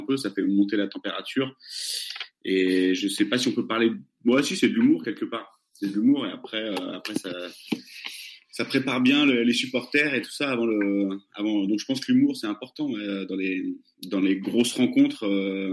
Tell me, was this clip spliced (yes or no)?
no